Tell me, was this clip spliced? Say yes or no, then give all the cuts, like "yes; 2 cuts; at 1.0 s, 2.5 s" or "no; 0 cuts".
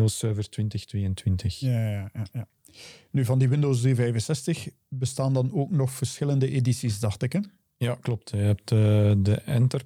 no; 0 cuts